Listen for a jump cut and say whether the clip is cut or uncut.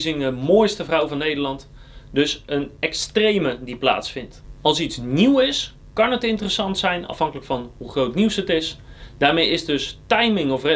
uncut